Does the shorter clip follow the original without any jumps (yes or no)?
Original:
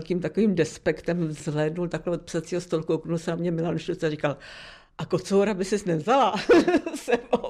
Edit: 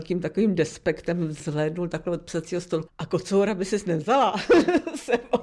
no